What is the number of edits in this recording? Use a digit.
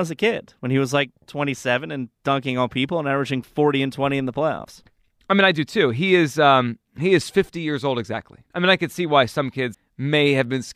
2